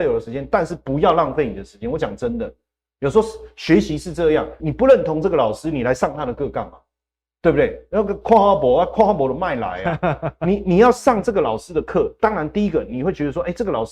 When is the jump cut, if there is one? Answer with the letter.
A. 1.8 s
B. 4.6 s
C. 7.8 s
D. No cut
B